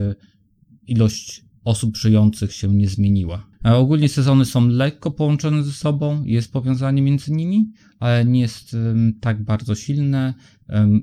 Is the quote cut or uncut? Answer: cut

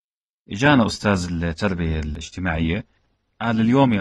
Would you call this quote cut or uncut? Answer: uncut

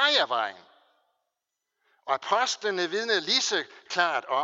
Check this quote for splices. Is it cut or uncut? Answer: uncut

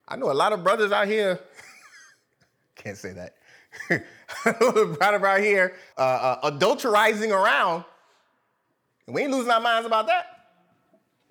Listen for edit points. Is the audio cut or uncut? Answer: cut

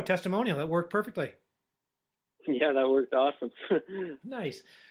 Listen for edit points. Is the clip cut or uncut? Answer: uncut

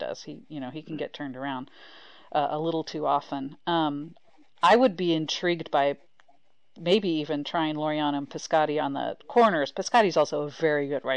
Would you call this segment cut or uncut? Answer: uncut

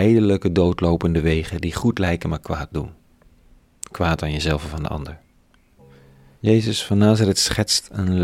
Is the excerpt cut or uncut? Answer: cut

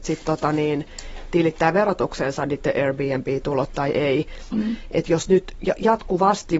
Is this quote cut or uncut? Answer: cut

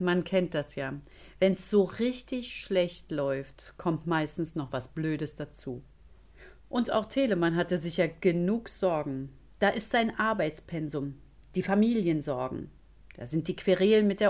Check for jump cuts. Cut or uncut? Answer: uncut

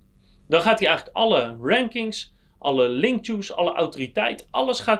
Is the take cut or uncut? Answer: uncut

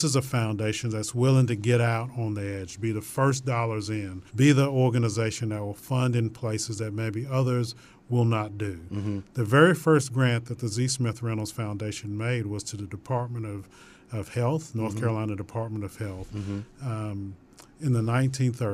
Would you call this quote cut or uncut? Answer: cut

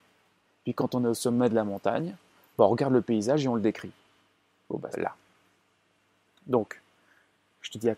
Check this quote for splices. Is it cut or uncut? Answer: cut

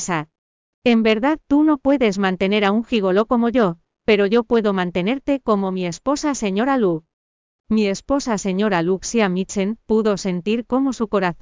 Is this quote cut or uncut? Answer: uncut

